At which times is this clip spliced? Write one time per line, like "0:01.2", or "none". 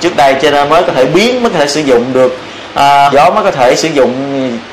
0:03.1

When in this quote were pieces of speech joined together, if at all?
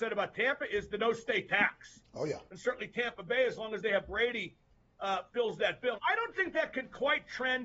0:02.5
0:05.9

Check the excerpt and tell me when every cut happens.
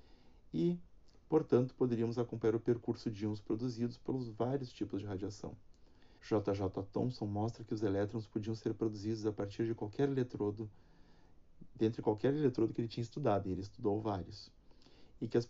0:06.2

